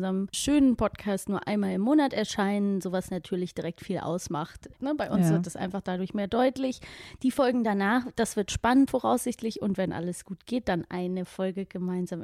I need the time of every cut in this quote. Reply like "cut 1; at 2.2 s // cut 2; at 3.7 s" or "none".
cut 1; at 4.8 s // cut 2; at 8.9 s

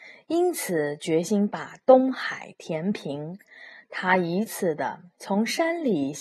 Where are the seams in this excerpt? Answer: cut 1; at 4.5 s

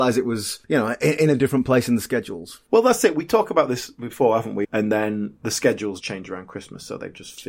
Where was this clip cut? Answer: cut 1; at 4.6 s // cut 2; at 6.0 s

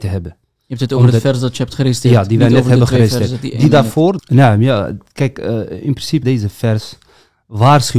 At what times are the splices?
cut 1; at 4.2 s // cut 2; at 6.2 s

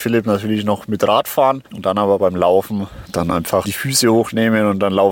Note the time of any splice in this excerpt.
cut 1; at 1.7 s // cut 2; at 3.6 s

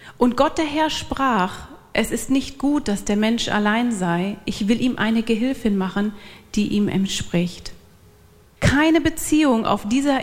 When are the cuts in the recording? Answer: cut 1; at 8.6 s

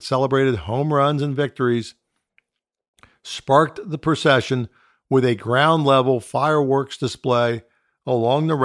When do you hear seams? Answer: none

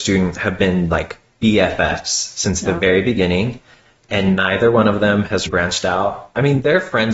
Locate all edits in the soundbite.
cut 1; at 5.5 s

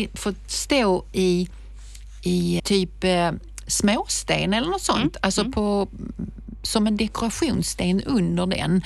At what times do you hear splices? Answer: cut 1; at 2.6 s

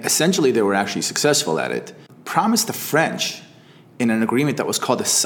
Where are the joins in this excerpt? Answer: none

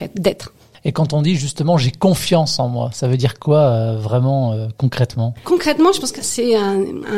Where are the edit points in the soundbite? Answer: cut 1; at 5.4 s

